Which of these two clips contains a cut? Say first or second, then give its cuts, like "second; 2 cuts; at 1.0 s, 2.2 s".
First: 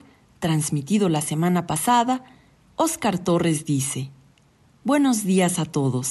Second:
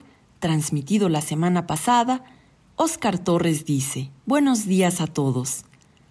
second; 1 cut; at 4.2 s